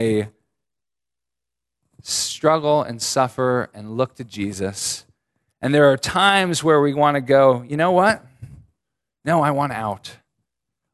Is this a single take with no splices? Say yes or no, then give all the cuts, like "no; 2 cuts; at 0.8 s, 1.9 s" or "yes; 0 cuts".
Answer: yes; 0 cuts